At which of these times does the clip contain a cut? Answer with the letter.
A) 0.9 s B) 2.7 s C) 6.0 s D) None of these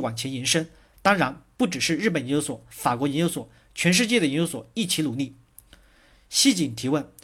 B